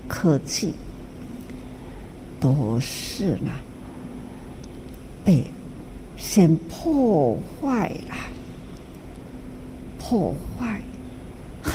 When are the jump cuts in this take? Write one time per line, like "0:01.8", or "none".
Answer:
none